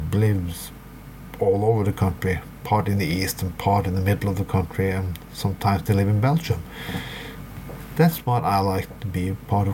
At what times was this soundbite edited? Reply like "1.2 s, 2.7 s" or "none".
none